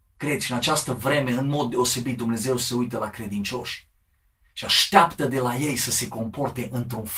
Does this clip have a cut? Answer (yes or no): no